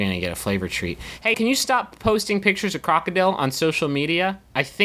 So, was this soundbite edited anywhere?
yes; 1 cut; at 1.3 s

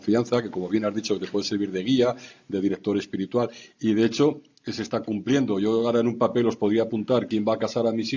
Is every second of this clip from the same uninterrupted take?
yes; 0 cuts

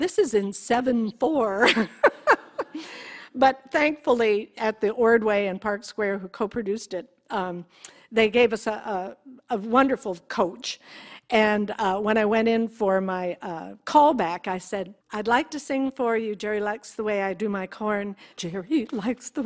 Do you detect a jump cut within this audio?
yes; 2 cuts; at 15.0 s, 18.3 s

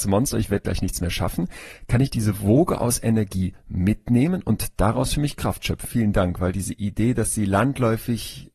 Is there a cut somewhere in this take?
yes; 1 cut; at 5.8 s

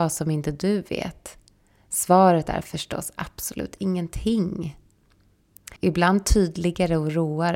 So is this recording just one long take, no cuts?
no; 1 cut; at 5.8 s

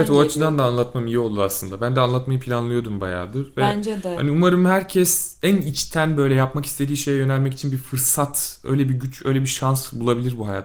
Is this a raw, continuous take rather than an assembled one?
yes; 0 cuts

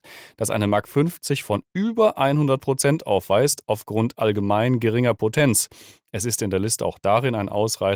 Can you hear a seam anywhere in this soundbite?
no; 0 cuts

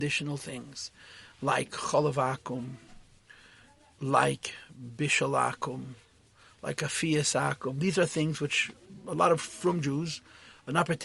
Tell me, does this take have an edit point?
no; 0 cuts

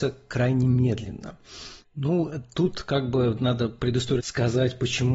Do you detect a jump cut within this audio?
yes; 2 cuts; at 1.8 s, 4.2 s

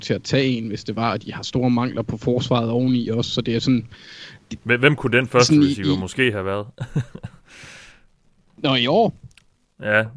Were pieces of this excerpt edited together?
no; 0 cuts

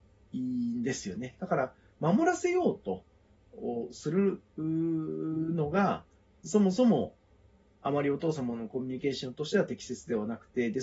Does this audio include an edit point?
no; 0 cuts

